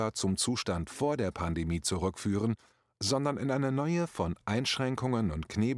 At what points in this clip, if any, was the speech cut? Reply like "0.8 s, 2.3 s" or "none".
none

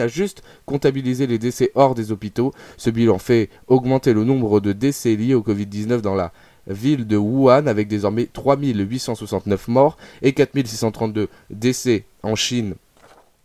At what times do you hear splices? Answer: none

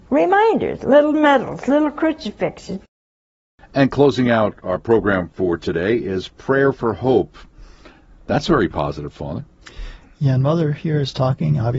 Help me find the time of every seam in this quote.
none

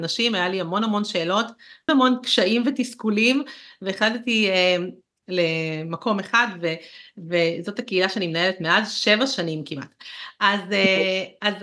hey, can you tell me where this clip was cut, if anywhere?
1.9 s, 5.2 s

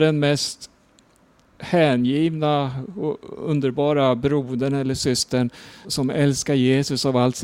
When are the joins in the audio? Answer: 5.8 s

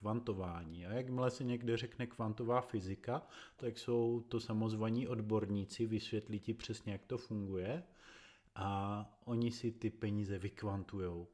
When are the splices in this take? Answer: 3.6 s

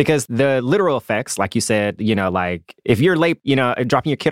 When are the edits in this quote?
none

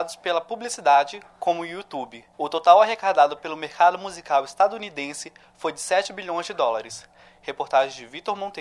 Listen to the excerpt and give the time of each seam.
2.3 s

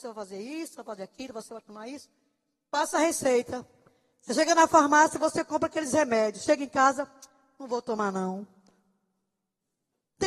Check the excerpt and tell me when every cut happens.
none

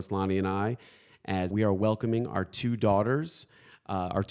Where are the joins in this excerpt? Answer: 1.5 s

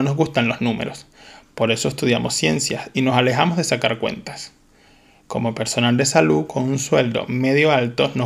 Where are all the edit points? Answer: none

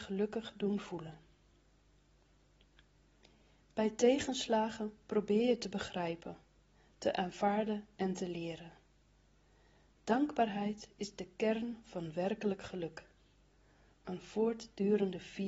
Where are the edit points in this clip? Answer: none

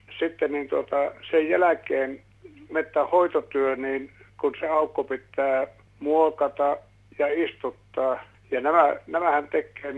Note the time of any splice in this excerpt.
none

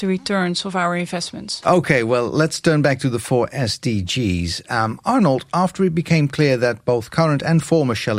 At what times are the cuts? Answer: none

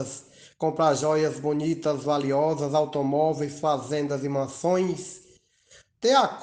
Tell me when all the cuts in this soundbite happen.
none

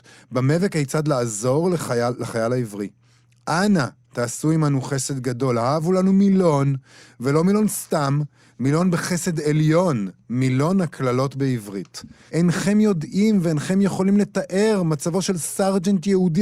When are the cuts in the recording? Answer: 12.3 s

